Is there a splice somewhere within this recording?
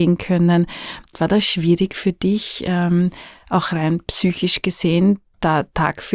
yes; 1 cut; at 1.1 s

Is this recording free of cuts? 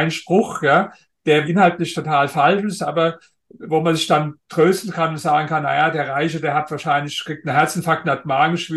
no; 1 cut; at 1.4 s

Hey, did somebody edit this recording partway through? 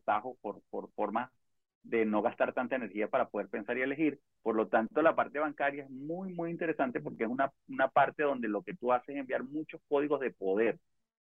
yes; 1 cut; at 4.4 s

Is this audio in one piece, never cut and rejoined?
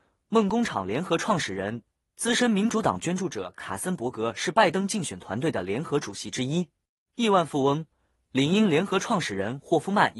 no; 1 cut; at 7.0 s

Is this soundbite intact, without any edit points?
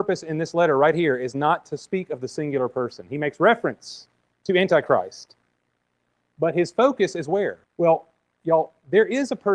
no; 1 cut; at 7.6 s

